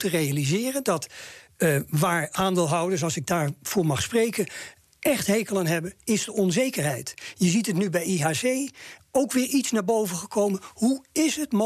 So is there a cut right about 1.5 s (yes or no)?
no